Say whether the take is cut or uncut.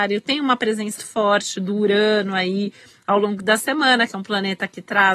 cut